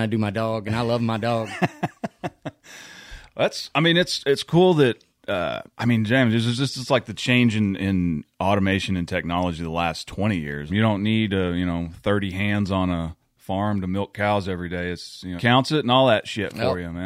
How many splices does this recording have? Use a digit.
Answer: 3